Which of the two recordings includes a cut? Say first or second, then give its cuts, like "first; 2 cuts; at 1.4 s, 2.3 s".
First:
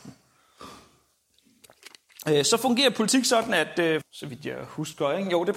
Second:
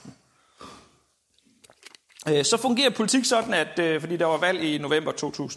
first; 1 cut; at 4.0 s